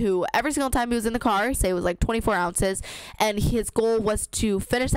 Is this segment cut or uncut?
cut